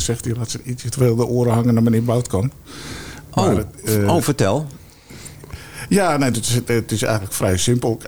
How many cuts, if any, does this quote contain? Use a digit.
0